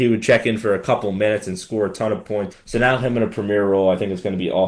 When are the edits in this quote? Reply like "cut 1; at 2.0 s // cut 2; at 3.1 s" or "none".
cut 1; at 2.5 s

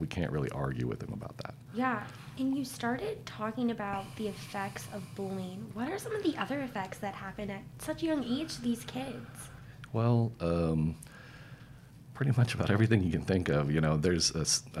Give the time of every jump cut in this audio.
none

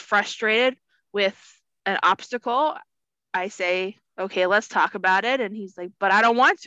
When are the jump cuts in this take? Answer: none

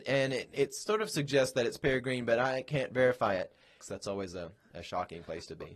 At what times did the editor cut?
cut 1; at 3.8 s

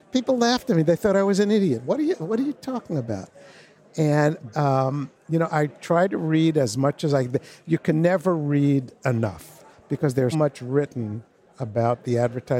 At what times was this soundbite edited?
cut 1; at 4.5 s // cut 2; at 10.3 s

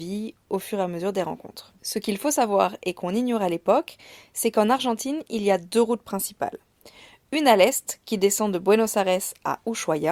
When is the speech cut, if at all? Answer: cut 1; at 1.8 s

